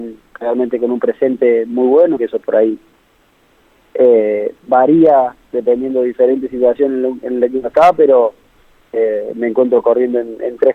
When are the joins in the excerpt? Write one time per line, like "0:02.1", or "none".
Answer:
0:02.2